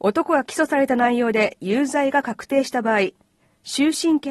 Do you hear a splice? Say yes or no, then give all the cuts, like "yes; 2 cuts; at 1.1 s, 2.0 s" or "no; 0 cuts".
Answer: no; 0 cuts